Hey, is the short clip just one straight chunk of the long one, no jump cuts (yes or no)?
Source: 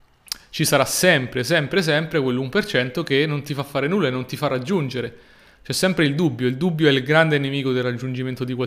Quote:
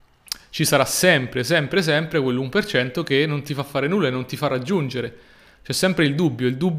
yes